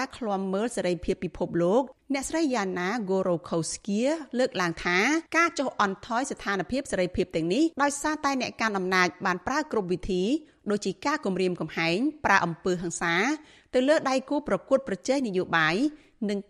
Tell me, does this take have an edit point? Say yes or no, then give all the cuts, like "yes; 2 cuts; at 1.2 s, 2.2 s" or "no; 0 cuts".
yes; 2 cuts; at 5.3 s, 7.7 s